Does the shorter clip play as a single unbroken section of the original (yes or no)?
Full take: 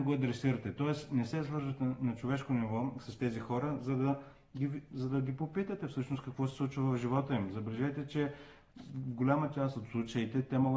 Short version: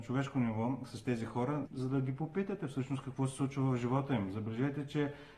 no